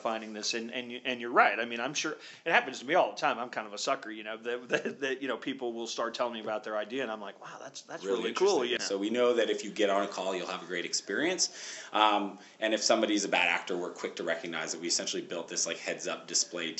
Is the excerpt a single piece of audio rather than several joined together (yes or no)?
no